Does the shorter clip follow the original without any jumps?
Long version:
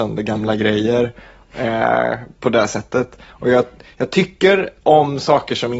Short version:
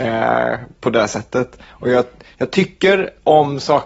yes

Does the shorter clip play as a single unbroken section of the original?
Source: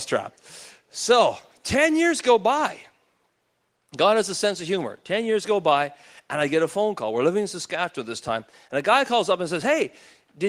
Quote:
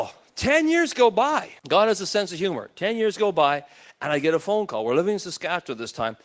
no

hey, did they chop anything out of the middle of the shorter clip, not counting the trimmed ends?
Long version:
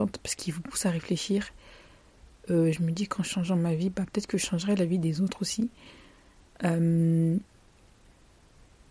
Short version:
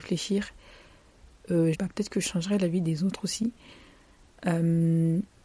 yes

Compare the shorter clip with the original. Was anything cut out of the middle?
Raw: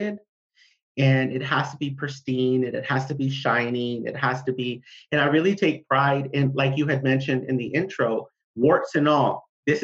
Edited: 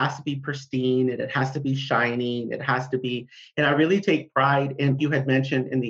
yes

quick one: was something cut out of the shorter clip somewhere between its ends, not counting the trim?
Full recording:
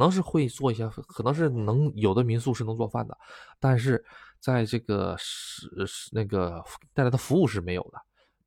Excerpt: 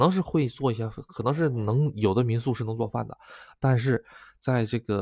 no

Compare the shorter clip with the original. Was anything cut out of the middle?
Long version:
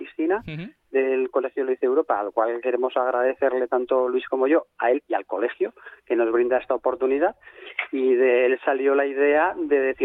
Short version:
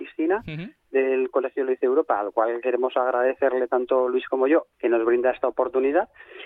yes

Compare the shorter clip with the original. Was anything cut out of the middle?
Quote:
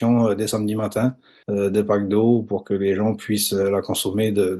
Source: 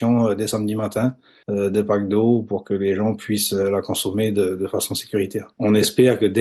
no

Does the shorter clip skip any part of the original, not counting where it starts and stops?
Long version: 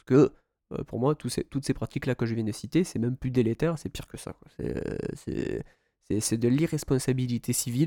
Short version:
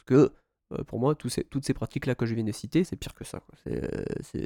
yes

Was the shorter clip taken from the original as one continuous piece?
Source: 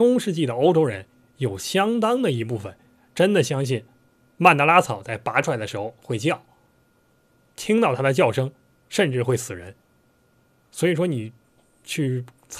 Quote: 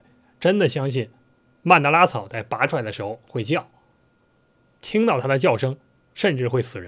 yes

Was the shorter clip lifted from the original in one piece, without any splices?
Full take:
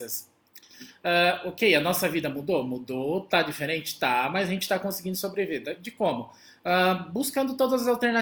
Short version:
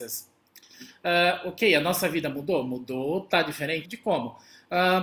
no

